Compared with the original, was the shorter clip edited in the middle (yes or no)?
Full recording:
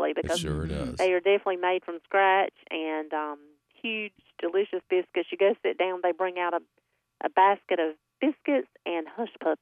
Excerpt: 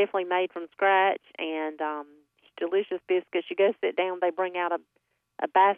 yes